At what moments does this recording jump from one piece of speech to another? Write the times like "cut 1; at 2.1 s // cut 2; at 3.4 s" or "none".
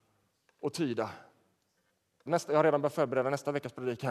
cut 1; at 2.3 s